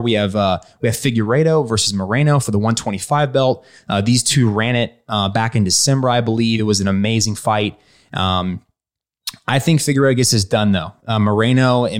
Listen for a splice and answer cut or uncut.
uncut